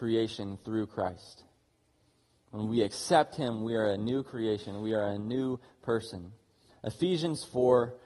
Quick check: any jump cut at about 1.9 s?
no; 1 cut; at 6.7 s

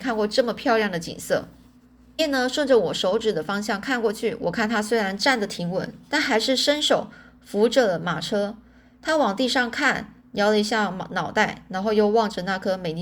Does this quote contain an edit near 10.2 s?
no; 1 cut; at 2.2 s

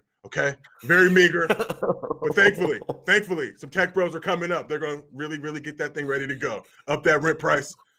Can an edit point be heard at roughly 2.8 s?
no; 0 cuts

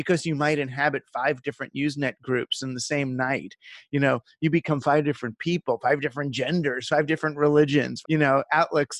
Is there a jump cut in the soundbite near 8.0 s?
yes; 1 cut; at 8.0 s

